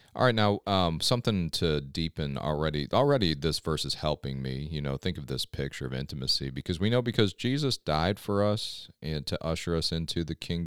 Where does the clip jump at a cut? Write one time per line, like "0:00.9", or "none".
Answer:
none